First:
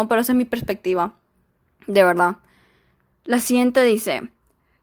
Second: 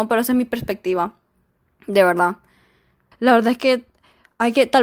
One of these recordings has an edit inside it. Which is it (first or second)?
second